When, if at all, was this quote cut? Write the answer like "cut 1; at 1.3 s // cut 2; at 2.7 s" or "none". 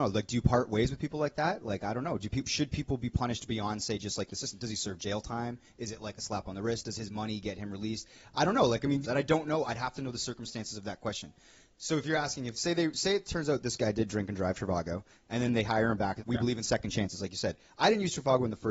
cut 1; at 9.0 s // cut 2; at 16.2 s